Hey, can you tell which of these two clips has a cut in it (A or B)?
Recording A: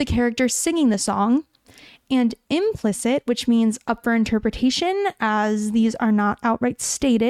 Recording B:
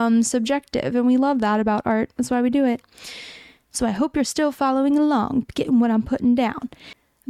B